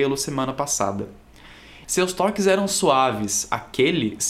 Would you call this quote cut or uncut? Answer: cut